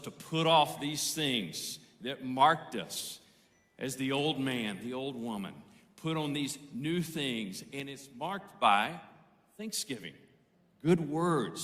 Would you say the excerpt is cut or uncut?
uncut